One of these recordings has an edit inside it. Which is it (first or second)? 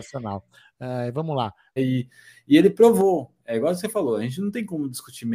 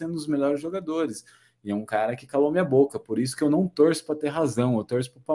first